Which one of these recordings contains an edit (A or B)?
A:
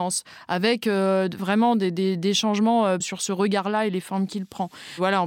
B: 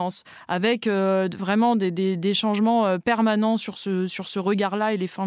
A